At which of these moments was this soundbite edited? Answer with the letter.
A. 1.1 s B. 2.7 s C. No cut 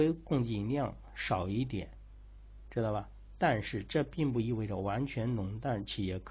B